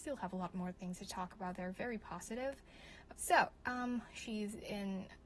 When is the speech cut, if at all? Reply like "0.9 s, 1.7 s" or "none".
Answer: 3.1 s